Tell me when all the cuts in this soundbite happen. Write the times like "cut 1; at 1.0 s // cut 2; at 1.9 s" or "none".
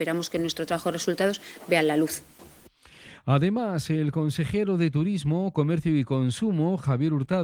none